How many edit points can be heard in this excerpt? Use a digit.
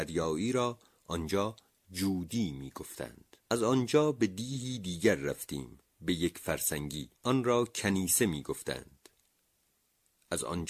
2